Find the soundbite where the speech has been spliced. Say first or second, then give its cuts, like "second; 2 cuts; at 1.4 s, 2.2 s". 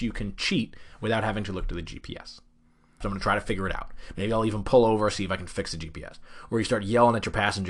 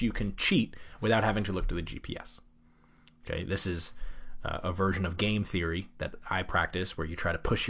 first; 1 cut; at 3.0 s